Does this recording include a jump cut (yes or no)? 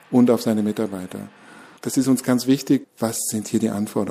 yes